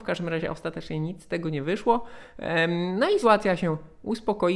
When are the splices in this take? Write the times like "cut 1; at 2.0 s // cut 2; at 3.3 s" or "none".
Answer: cut 1; at 3.2 s